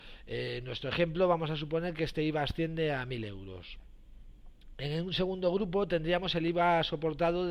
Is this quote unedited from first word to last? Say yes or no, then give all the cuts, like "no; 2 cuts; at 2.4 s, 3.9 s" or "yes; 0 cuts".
yes; 0 cuts